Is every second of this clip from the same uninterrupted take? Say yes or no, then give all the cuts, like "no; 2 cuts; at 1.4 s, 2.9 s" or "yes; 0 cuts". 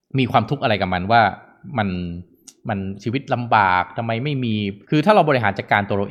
no; 1 cut; at 4.8 s